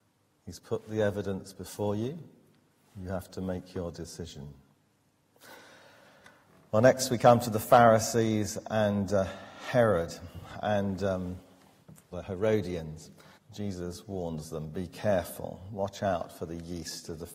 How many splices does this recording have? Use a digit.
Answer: 2